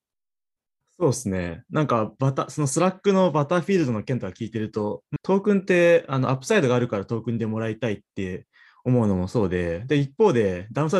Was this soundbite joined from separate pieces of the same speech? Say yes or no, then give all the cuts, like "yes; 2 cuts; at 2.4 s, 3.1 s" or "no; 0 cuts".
yes; 1 cut; at 5.2 s